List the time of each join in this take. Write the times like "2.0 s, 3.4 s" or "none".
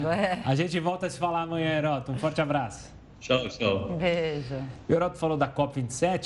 none